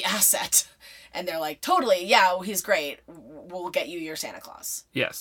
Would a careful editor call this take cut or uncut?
uncut